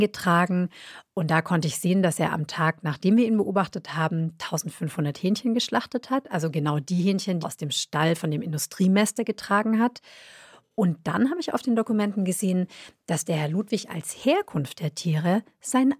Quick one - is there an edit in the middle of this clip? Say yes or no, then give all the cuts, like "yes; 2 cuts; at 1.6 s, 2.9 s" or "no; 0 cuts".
yes; 1 cut; at 7.4 s